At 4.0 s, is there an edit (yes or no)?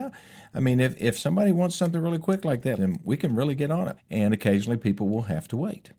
yes